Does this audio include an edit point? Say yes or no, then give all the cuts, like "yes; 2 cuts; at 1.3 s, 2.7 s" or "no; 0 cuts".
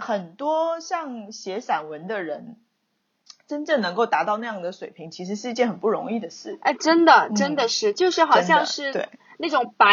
no; 0 cuts